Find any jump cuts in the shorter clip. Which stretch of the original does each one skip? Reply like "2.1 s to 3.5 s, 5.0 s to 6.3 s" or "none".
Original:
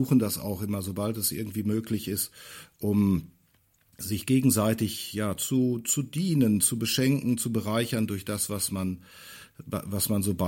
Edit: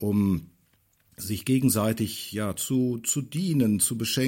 none

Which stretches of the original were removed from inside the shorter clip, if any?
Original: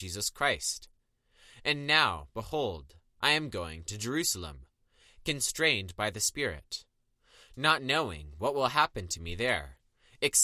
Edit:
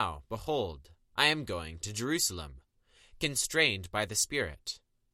none

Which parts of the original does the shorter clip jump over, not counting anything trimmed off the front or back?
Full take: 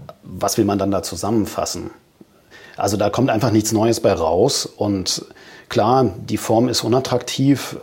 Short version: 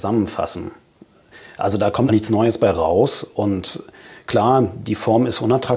3.3 s to 3.5 s

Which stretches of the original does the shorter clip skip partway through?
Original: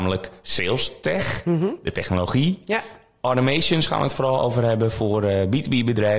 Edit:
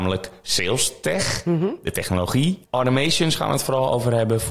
2.6 s to 3.1 s

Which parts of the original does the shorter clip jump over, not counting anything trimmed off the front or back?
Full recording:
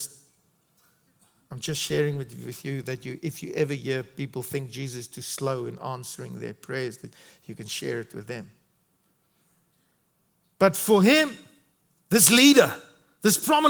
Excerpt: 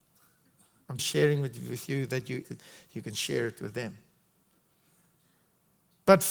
1.6 s to 1.7 s, 3.2 s to 7.0 s

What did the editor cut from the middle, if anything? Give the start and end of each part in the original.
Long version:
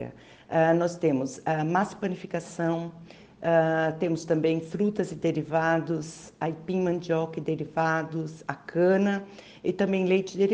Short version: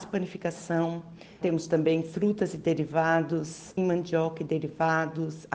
3.3 s to 4.0 s, 6.4 s to 6.7 s

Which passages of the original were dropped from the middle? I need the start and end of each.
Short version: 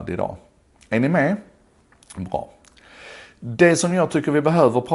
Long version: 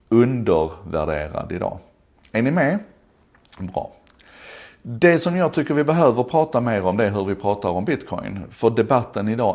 none

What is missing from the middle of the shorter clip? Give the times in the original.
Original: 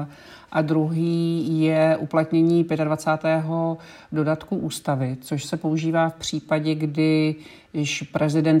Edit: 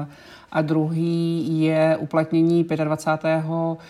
none

